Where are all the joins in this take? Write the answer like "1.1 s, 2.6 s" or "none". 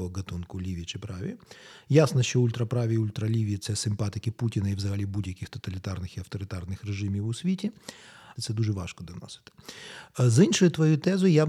8.4 s